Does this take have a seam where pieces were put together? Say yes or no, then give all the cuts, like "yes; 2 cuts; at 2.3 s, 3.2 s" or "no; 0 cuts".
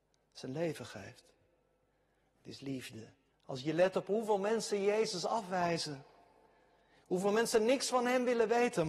yes; 1 cut; at 3.3 s